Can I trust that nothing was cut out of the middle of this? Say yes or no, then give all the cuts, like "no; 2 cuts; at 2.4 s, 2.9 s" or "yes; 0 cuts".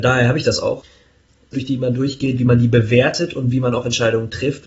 no; 1 cut; at 1.5 s